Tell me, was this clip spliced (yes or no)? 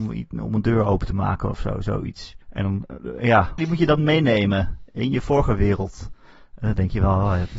yes